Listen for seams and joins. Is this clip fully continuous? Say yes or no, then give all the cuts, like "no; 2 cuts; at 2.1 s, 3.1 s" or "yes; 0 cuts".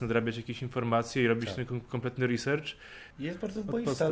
no; 1 cut; at 3.1 s